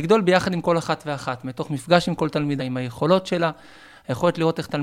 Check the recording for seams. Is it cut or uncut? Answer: cut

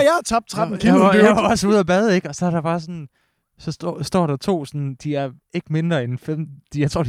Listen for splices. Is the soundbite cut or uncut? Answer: uncut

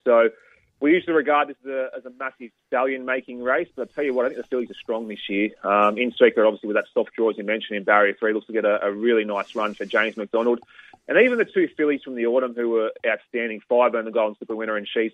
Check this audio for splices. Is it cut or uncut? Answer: uncut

